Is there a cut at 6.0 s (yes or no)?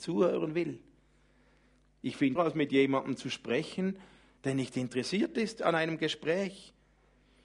no